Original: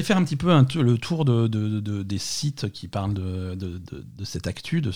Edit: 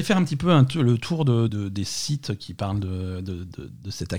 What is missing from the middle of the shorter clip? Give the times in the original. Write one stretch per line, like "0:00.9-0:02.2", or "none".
0:01.5-0:01.8